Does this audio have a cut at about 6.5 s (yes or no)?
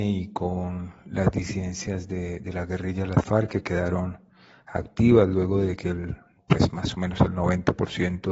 no